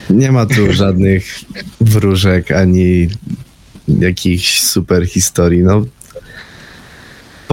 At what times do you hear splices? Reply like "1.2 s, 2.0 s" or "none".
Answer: 1.8 s